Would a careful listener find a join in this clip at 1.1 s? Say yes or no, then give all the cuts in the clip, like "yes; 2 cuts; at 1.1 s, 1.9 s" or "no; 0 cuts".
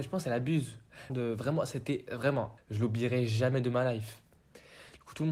yes; 2 cuts; at 1.1 s, 2.6 s